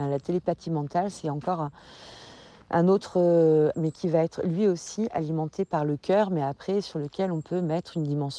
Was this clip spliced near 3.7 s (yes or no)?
yes